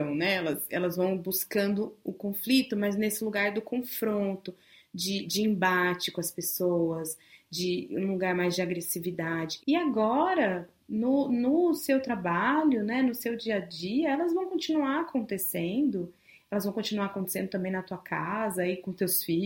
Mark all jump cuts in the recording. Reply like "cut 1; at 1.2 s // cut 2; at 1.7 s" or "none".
cut 1; at 9.6 s